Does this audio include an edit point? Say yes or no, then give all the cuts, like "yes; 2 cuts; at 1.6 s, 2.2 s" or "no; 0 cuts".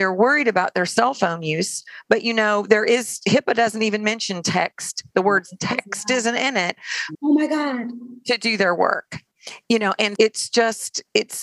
yes; 2 cuts; at 7.1 s, 10.2 s